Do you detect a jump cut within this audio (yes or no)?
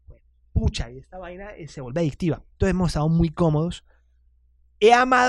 yes